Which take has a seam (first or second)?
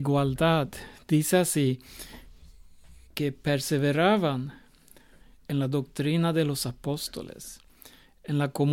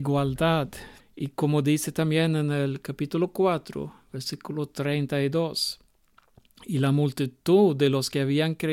second